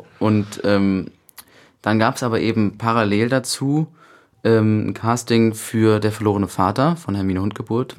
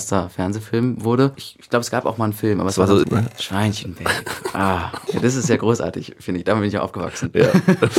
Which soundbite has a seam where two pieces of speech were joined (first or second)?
second